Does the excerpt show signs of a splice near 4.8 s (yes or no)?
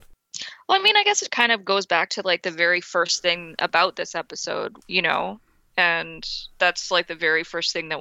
yes